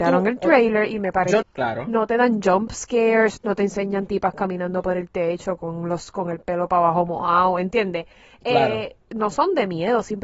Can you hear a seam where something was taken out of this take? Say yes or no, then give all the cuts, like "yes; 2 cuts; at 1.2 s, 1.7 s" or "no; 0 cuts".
yes; 2 cuts; at 1.4 s, 3.4 s